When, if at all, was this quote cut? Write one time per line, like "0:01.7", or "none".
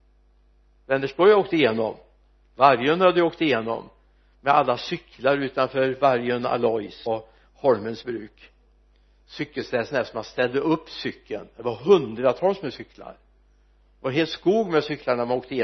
0:07.1